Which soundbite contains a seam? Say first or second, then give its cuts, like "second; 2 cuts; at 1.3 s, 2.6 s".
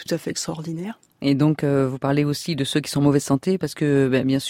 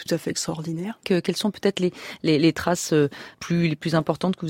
second; 2 cuts; at 1.0 s, 3.3 s